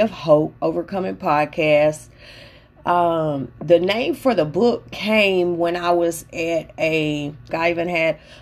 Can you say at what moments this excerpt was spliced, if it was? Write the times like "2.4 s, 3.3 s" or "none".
7.5 s